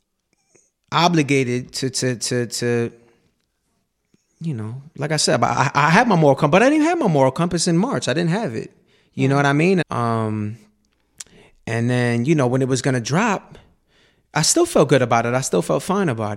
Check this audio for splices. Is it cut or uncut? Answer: cut